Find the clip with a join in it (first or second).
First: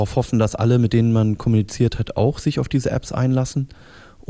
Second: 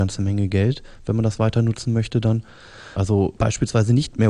second